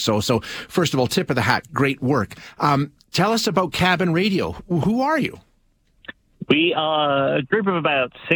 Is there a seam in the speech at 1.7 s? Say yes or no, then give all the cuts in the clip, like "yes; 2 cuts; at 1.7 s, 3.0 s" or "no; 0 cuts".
yes; 1 cut; at 1.7 s